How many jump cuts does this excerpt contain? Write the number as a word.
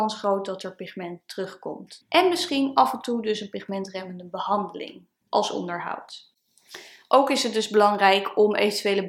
one